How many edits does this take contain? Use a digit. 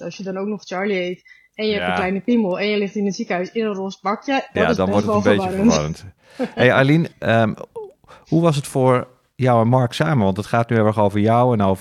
1